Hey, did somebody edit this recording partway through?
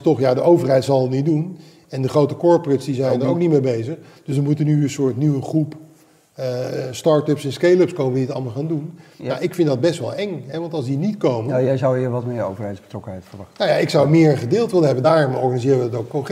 no; 0 cuts

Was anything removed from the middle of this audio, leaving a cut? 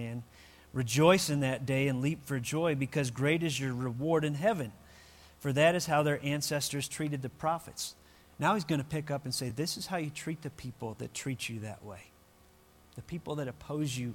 no; 0 cuts

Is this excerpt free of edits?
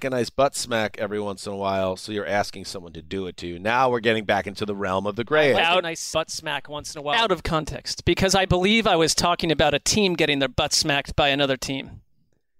yes; 0 cuts

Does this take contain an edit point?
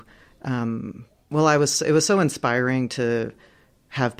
no; 0 cuts

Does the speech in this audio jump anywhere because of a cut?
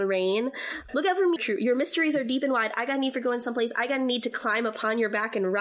yes; 1 cut; at 1.4 s

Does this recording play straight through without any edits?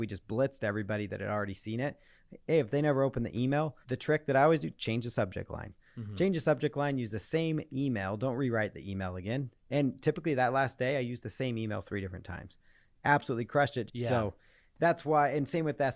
no; 2 cuts; at 3.8 s, 13.9 s

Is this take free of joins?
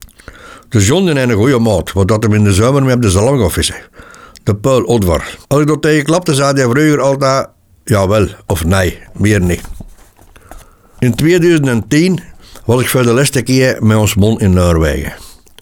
no; 1 cut; at 5.4 s

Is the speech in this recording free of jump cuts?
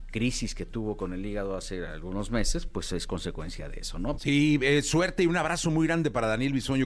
no; 1 cut; at 4.2 s

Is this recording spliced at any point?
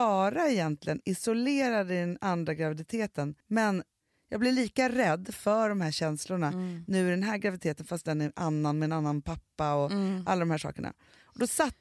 yes; 1 cut; at 3.4 s

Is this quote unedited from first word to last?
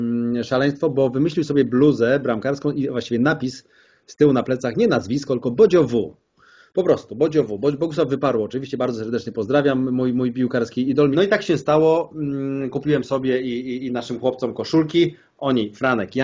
no; 1 cut; at 11.1 s

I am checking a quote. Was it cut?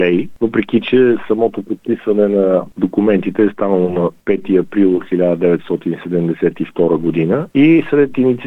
no; 0 cuts

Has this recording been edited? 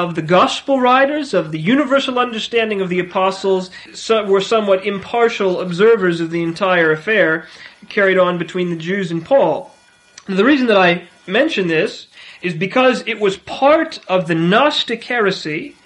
yes; 1 cut; at 3.9 s

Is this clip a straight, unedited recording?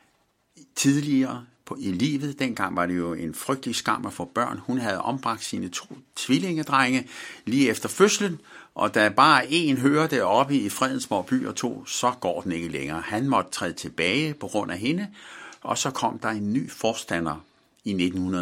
yes; 0 cuts

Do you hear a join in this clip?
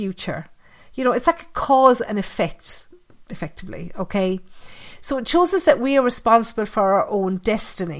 no; 0 cuts

